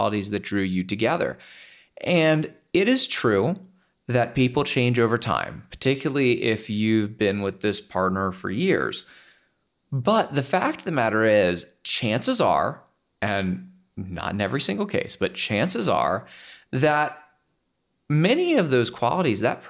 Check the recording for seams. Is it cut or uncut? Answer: uncut